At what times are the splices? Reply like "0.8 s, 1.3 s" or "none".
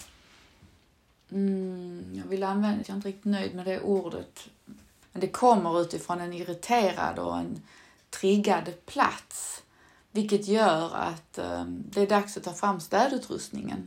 2.8 s, 5.0 s